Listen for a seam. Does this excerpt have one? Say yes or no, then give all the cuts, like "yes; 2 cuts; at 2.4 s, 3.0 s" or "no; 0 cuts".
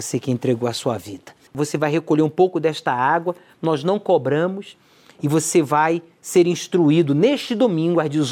yes; 1 cut; at 1.5 s